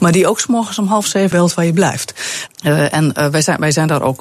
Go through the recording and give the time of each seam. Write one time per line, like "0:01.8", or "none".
0:01.3
0:02.5